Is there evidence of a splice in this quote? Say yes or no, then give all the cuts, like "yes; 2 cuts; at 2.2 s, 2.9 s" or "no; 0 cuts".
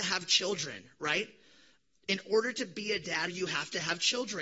yes; 1 cut; at 3.3 s